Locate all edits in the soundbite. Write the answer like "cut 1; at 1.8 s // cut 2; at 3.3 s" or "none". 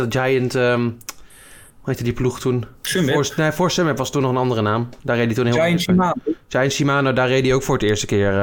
cut 1; at 2.8 s